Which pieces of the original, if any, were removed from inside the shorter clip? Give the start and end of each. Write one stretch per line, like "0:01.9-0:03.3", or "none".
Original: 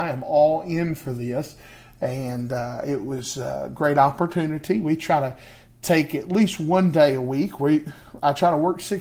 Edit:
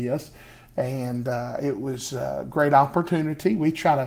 none